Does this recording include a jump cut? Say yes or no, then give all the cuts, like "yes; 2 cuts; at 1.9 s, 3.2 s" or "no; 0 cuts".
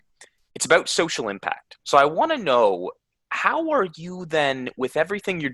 yes; 1 cut; at 1.8 s